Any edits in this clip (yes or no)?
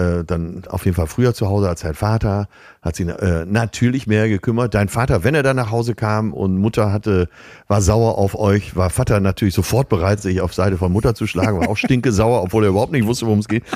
no